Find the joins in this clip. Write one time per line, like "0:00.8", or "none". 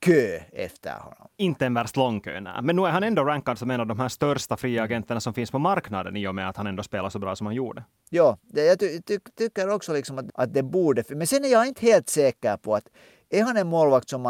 none

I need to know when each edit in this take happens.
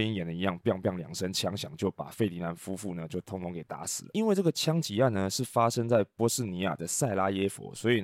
none

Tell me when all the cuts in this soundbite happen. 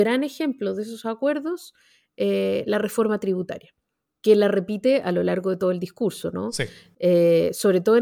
none

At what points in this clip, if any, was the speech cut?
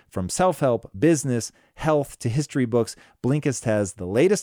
none

